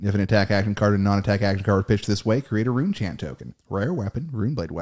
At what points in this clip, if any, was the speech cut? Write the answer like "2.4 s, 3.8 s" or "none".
3.6 s